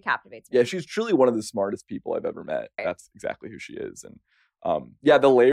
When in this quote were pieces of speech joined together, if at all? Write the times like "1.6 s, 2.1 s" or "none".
2.8 s